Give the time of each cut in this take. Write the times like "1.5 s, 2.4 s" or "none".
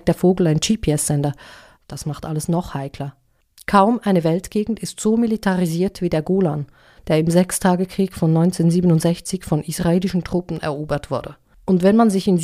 1.7 s, 7.0 s